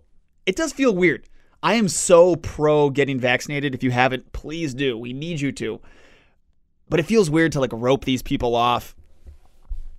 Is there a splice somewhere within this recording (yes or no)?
no